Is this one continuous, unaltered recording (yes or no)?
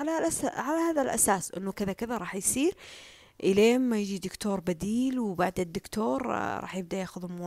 no